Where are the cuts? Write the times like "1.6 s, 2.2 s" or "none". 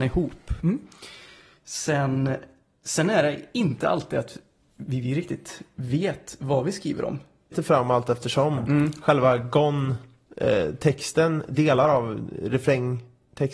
7.5 s